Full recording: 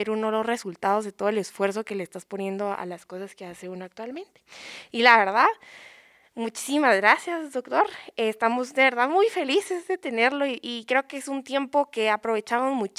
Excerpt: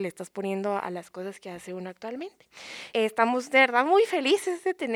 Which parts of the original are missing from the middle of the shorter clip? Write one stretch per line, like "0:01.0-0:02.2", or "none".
0:04.8-0:08.1